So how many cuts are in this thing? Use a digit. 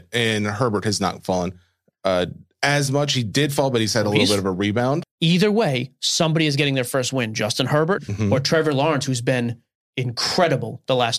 2